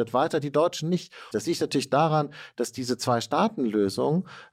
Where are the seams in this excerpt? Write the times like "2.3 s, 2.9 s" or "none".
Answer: 1.3 s